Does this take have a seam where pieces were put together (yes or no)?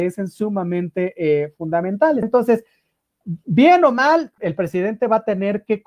yes